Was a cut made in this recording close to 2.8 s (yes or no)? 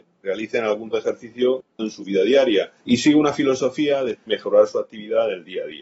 yes